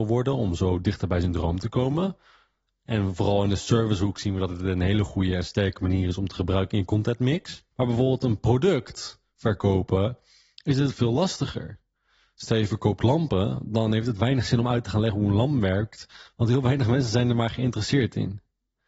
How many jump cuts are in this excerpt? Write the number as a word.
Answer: one